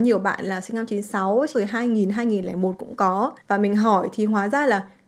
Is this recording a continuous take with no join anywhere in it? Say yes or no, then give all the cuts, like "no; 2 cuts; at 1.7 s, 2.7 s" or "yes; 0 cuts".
no; 2 cuts; at 1.5 s, 3.4 s